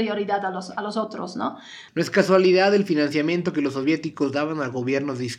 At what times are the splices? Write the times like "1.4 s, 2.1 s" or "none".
1.9 s

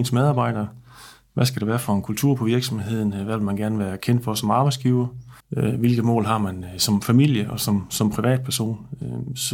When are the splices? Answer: 5.4 s

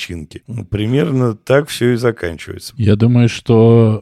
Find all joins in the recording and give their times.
2.8 s

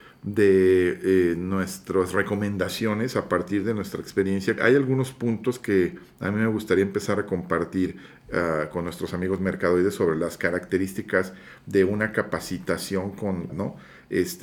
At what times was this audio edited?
4.6 s, 13.5 s

